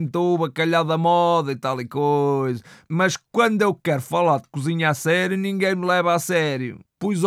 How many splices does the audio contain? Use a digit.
0